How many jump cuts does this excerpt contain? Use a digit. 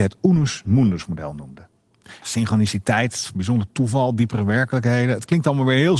1